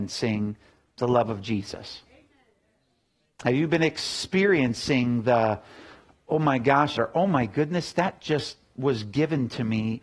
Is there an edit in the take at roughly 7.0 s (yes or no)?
yes